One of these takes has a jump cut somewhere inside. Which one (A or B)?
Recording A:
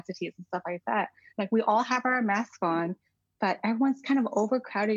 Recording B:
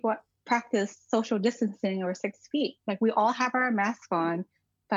A